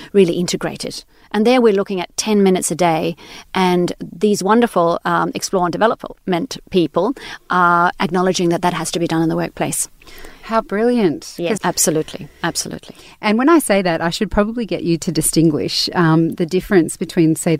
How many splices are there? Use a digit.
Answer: 2